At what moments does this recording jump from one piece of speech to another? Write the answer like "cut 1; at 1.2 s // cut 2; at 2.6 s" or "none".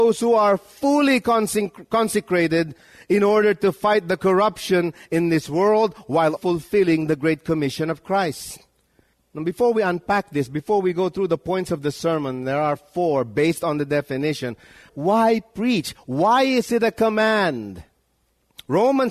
cut 1; at 6.4 s // cut 2; at 14.9 s